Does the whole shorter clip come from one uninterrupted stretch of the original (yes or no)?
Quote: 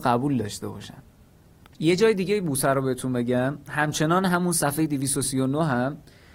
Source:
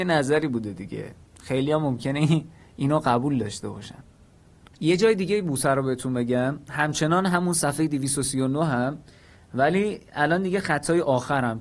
yes